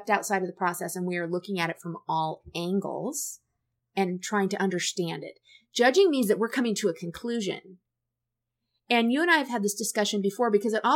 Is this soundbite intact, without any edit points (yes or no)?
yes